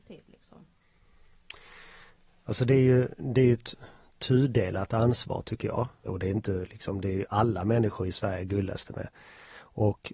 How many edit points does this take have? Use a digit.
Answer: 1